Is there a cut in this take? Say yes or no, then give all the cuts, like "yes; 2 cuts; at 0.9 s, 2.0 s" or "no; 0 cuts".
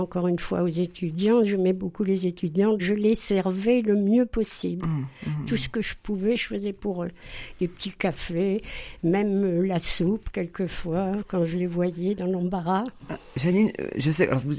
yes; 1 cut; at 2.8 s